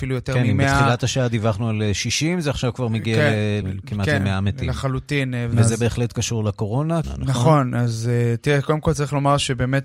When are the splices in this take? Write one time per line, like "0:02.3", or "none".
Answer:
0:03.6
0:05.5
0:07.0